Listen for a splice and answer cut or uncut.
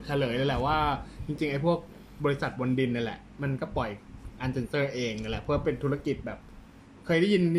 uncut